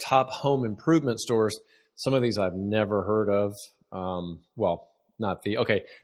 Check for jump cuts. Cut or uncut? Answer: uncut